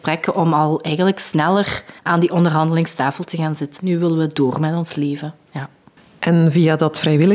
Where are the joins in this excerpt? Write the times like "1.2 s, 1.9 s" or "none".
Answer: 2.0 s, 3.8 s